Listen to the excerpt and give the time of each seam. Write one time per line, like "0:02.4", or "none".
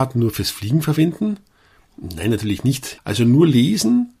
0:03.0